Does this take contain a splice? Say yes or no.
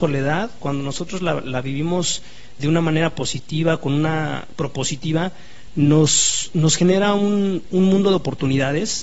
yes